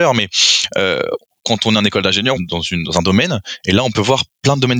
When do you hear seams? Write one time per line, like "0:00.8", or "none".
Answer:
0:02.4